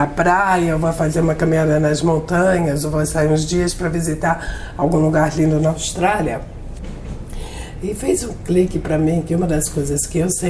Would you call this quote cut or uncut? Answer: uncut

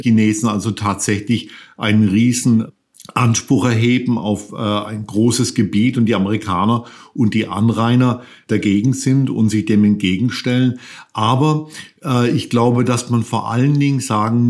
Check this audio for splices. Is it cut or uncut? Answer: uncut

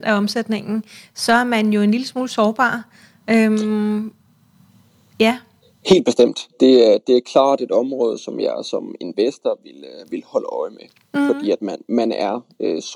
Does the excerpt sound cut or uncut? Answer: uncut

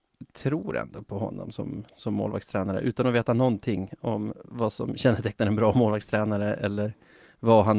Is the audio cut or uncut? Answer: uncut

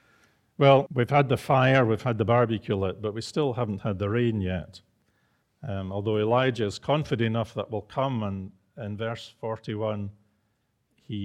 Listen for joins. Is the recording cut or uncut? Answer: uncut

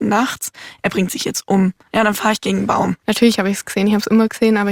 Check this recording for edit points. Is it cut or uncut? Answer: cut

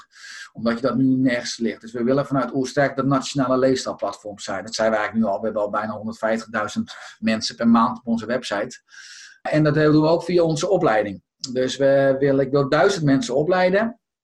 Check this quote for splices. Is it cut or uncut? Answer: uncut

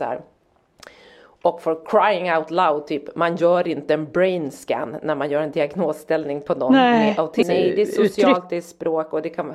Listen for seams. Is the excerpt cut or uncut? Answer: cut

